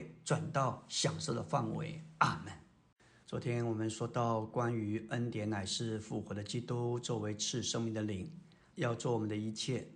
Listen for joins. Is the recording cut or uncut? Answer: cut